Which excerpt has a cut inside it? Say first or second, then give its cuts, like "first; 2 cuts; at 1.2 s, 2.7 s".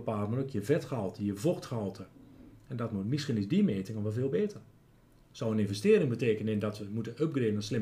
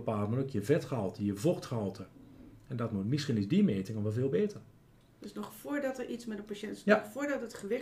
second; 1 cut; at 5.0 s